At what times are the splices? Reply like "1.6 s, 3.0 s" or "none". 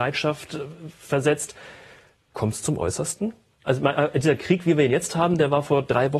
3.7 s